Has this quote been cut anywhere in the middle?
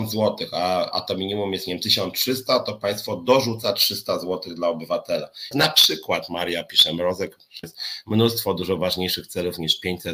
yes; 3 cuts; at 0.9 s, 5.5 s, 7.6 s

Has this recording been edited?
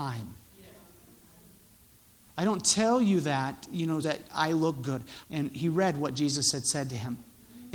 yes; 2 cuts; at 4.0 s, 5.2 s

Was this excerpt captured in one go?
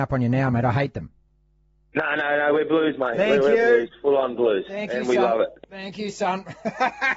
yes; 0 cuts

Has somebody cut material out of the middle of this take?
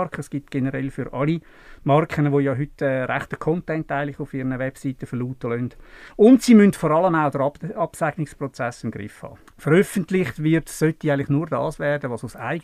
yes; 1 cut; at 9.5 s

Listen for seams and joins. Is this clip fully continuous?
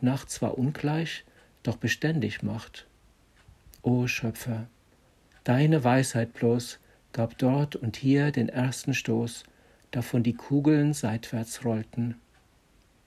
yes; 0 cuts

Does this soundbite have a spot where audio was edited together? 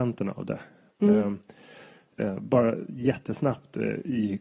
no; 0 cuts

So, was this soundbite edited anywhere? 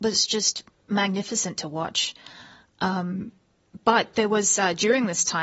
no; 0 cuts

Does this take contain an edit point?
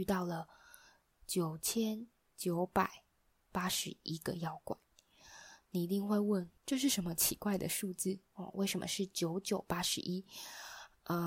yes; 1 cut; at 8.3 s

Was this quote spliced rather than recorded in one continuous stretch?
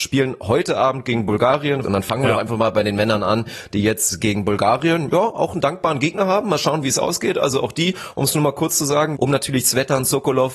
yes; 2 cuts; at 1.8 s, 9.2 s

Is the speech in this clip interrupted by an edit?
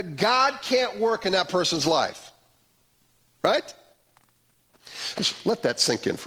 yes; 1 cut; at 5.1 s

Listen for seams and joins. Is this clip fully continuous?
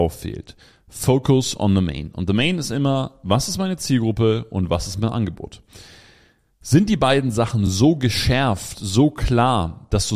yes; 0 cuts

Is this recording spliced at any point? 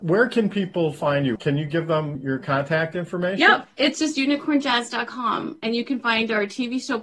no; 0 cuts

